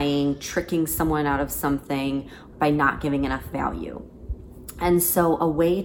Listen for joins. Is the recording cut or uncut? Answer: cut